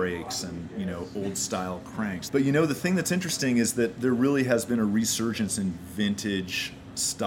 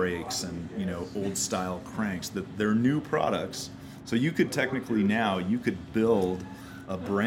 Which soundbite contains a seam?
first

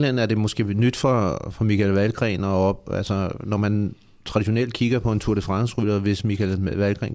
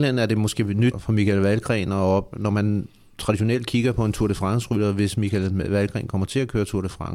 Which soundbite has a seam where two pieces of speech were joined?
second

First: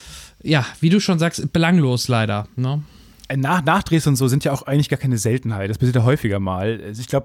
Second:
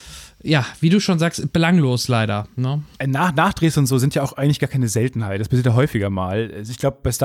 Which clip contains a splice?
second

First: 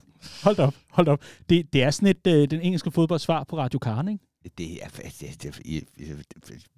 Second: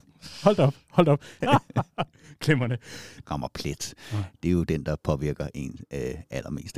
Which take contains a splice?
second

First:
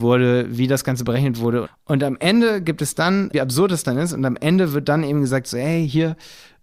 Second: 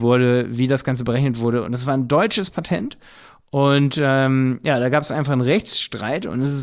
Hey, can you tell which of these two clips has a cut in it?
first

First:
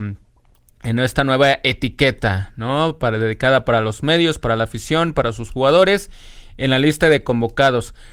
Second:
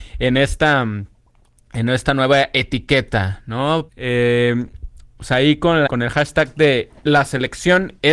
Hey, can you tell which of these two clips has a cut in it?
second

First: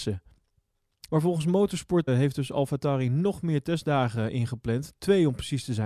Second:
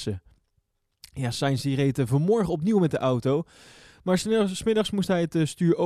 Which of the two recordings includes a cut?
first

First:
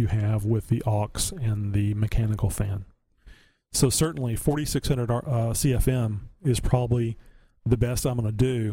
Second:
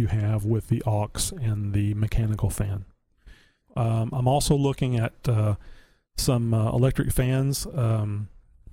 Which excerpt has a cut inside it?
second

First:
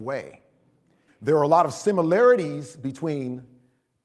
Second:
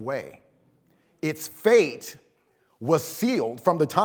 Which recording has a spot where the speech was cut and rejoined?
first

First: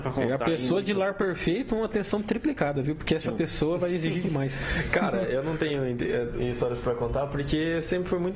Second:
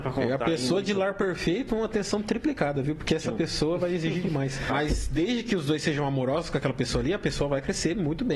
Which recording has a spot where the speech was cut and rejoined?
second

